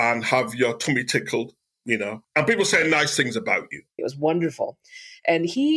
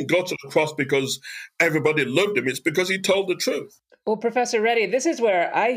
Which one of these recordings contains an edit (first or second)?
first